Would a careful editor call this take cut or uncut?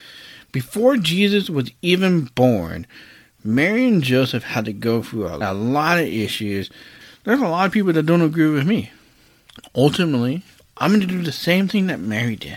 uncut